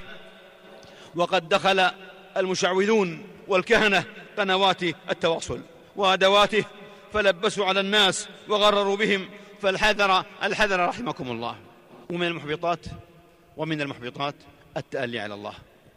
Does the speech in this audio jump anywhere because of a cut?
yes; 1 cut; at 12.0 s

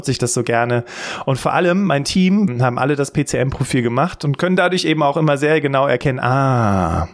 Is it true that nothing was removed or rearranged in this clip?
no; 1 cut; at 2.5 s

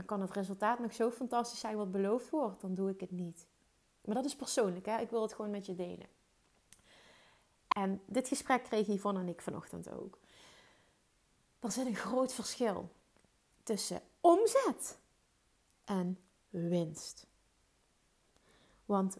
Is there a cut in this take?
yes; 1 cut; at 7.7 s

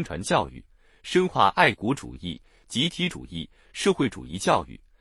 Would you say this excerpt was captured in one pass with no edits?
yes; 0 cuts

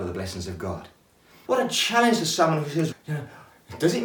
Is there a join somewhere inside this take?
yes; 2 cuts; at 1.4 s, 2.9 s

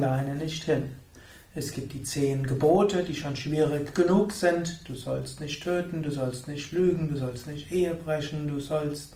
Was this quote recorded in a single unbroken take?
yes; 0 cuts

